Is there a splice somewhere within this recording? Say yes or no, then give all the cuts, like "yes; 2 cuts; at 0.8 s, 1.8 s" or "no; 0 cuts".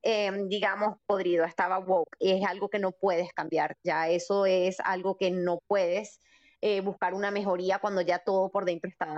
no; 0 cuts